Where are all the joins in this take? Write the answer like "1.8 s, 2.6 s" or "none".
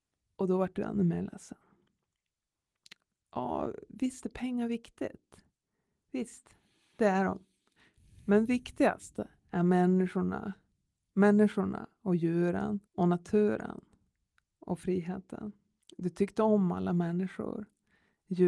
12.9 s, 15.8 s